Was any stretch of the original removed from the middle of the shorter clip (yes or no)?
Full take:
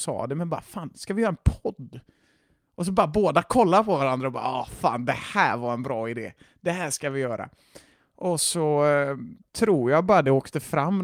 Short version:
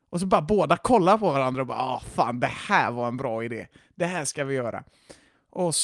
no